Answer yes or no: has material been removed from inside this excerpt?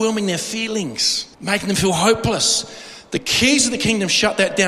yes